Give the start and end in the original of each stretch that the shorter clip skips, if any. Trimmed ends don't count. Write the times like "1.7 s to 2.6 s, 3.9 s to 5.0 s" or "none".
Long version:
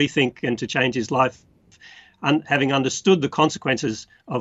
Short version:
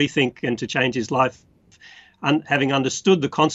none